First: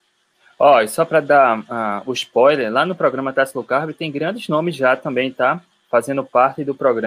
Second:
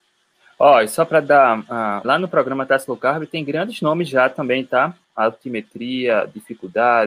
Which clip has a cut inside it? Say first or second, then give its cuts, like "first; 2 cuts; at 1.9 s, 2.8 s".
second; 2 cuts; at 2.0 s, 5.0 s